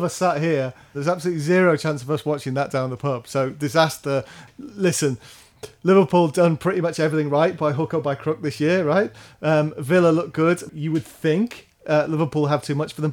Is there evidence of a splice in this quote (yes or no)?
yes